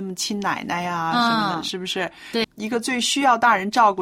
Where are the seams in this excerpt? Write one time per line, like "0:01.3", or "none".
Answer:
0:02.4